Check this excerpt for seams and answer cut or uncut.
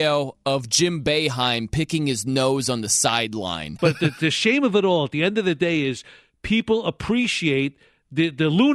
cut